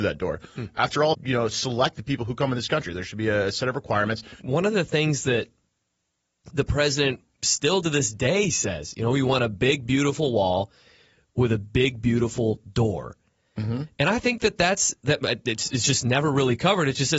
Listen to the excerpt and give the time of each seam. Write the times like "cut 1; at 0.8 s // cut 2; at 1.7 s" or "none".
cut 1; at 1.1 s // cut 2; at 4.4 s